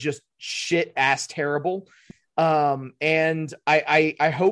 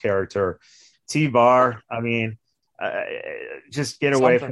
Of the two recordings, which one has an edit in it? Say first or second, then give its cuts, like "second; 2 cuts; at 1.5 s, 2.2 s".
second; 1 cut; at 0.9 s